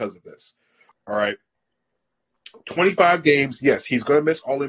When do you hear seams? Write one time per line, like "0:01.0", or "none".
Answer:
0:00.9